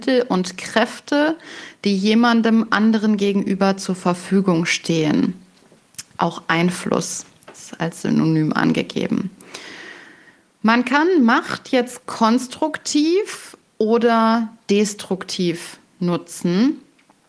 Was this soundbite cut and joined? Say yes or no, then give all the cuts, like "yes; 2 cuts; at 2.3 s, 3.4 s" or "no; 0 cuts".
no; 0 cuts